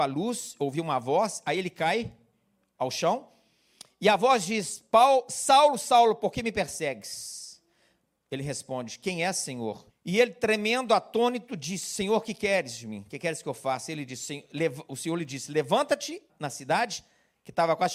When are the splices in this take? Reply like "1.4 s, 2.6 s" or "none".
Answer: 9.9 s, 16.3 s